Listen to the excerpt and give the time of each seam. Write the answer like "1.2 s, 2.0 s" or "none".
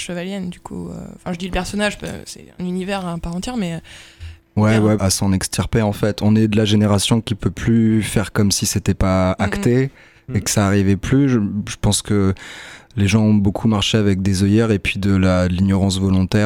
5.0 s